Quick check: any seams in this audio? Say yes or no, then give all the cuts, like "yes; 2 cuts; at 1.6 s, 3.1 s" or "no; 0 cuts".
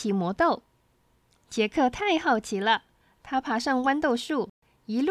no; 0 cuts